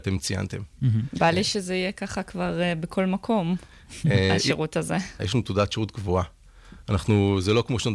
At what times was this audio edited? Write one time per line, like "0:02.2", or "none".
0:05.2